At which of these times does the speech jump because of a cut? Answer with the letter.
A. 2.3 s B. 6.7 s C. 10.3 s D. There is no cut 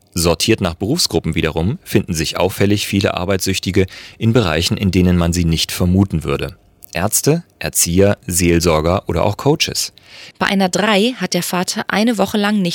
C